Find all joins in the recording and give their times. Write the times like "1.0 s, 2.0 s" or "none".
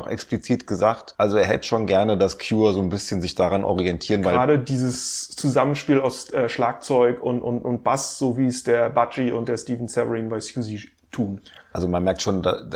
none